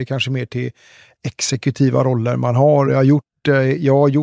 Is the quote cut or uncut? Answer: uncut